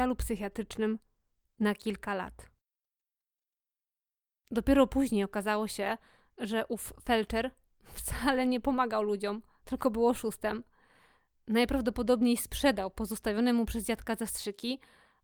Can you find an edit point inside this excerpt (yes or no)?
no